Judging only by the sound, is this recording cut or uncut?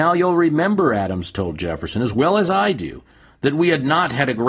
uncut